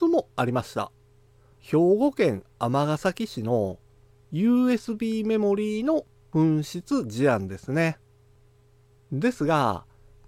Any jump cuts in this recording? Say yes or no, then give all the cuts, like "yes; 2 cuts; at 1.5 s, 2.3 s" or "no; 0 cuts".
yes; 1 cut; at 1.5 s